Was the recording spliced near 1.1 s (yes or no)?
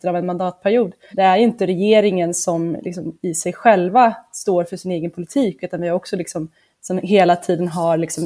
yes